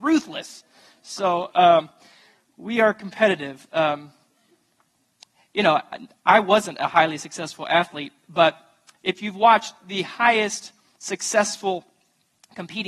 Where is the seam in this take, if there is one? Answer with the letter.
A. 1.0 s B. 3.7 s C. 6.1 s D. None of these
D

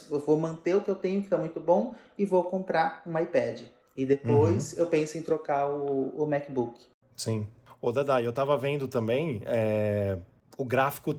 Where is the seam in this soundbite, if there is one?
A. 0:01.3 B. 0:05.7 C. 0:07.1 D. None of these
D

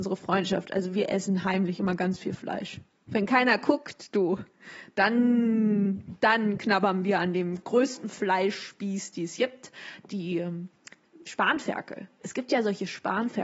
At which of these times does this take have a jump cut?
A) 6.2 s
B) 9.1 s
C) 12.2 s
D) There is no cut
D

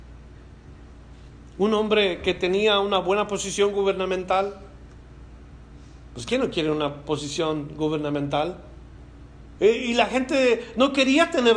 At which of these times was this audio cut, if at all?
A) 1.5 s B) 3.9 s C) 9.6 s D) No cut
C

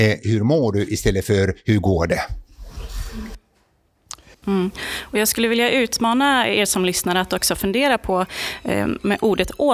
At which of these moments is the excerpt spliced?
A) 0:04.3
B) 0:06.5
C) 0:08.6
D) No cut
A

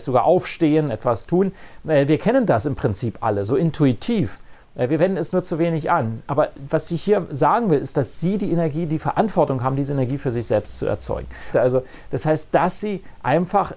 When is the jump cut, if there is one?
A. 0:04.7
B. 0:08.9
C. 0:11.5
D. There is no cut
C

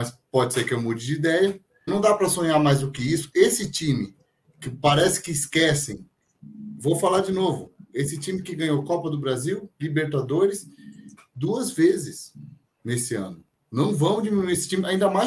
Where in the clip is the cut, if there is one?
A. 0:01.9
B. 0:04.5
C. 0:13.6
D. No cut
A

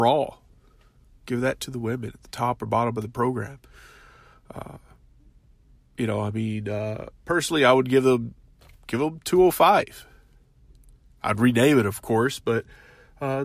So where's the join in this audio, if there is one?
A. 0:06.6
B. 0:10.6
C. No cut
C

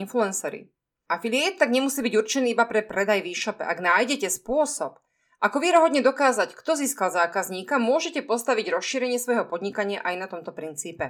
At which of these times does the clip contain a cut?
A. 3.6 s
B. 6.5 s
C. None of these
C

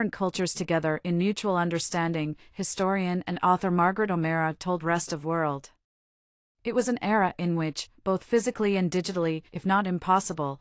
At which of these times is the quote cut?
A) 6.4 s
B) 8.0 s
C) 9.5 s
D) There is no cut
C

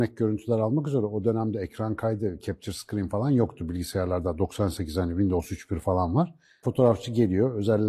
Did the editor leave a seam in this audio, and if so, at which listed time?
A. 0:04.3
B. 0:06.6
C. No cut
B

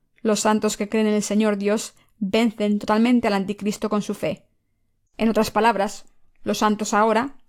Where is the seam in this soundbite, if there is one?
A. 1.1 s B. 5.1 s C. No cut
B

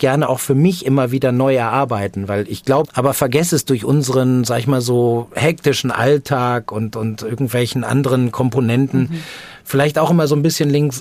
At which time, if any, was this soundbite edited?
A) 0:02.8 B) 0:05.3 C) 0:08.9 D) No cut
A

